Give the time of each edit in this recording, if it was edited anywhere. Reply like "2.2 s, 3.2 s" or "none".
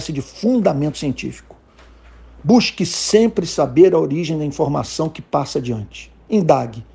none